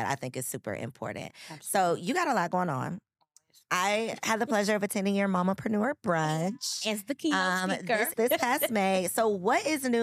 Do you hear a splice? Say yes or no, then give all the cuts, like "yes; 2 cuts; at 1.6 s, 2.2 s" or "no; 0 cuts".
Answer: yes; 1 cut; at 8.1 s